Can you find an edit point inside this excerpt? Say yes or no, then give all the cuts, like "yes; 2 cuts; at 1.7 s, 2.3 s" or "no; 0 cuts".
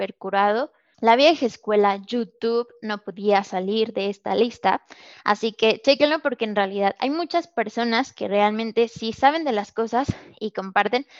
yes; 1 cut; at 0.9 s